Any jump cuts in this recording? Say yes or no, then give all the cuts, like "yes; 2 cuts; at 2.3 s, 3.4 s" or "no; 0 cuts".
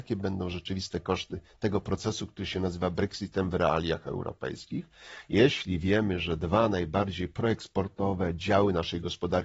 no; 0 cuts